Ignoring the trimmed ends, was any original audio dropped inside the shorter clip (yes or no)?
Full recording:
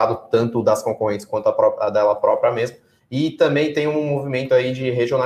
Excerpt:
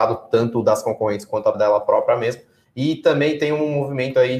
yes